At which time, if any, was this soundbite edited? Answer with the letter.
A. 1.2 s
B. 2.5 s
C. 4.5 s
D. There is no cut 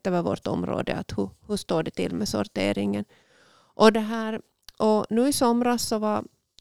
D